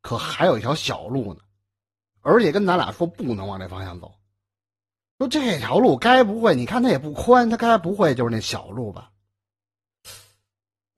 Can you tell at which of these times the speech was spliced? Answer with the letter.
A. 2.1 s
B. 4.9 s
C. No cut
A